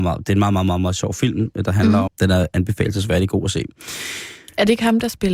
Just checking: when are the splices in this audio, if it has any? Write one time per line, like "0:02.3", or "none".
0:02.1